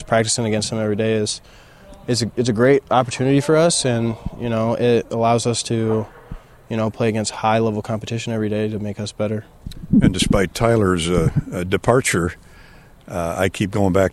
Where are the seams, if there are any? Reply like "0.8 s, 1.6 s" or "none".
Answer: none